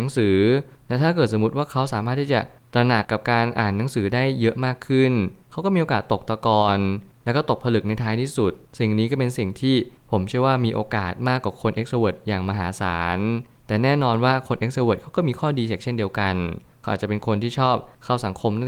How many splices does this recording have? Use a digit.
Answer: 1